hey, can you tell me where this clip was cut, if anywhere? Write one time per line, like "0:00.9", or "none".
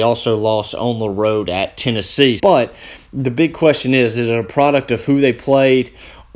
0:02.4